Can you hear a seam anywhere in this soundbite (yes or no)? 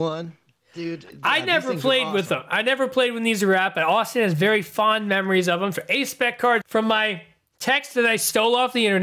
yes